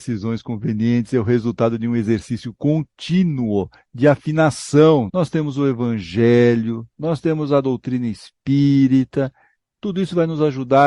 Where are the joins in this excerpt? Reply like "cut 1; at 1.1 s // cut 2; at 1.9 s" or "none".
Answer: cut 1; at 5.1 s